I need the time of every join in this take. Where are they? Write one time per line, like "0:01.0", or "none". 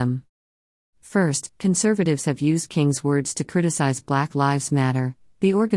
none

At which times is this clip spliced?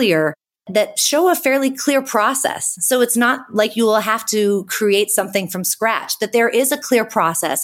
none

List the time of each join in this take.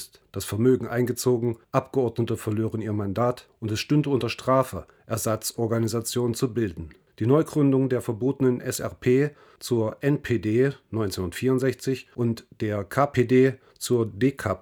0:12.1

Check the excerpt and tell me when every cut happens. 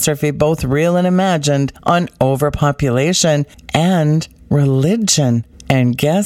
none

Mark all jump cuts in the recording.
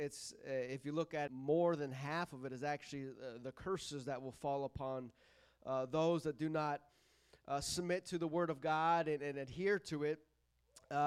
0:01.3

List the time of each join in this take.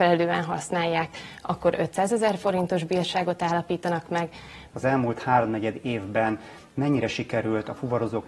0:04.7

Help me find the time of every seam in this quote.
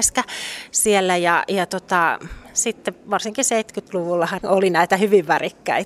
0:04.4

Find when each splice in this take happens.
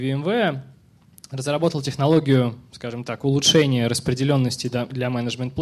none

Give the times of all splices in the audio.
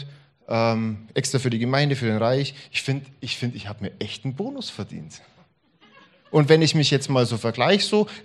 none

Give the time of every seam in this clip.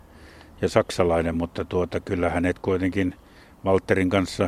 none

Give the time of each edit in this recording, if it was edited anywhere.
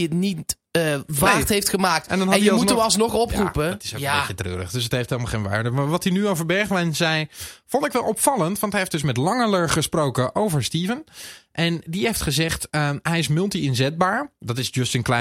none

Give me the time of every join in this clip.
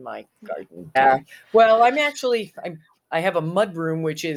0:01.0

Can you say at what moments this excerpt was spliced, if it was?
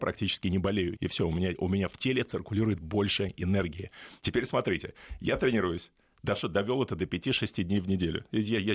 0:01.0
0:04.2

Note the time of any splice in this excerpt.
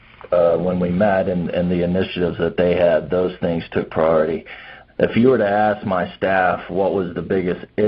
0:04.9

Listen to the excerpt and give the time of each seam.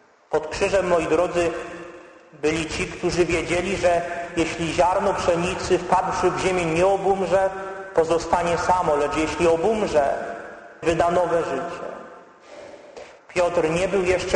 0:10.8
0:13.2

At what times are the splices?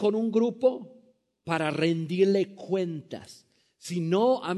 none

